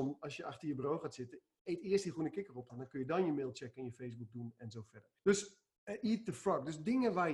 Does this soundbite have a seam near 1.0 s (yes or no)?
no